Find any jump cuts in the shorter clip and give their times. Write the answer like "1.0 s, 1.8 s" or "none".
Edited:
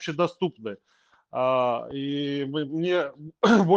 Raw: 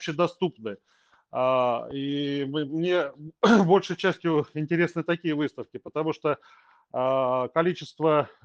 none